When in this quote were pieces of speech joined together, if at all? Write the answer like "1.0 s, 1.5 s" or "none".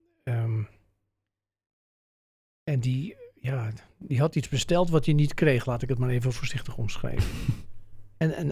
none